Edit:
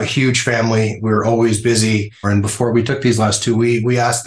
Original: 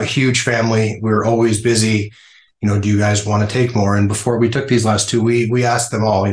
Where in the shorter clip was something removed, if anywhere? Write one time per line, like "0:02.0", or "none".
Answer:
0:02.2